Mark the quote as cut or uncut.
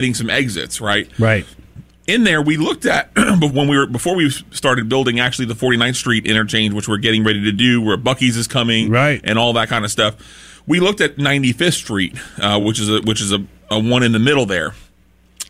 uncut